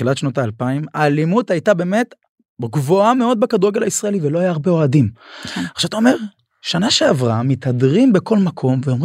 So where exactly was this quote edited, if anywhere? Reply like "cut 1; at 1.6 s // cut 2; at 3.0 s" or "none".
none